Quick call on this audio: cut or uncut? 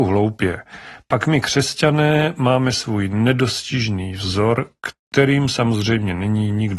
uncut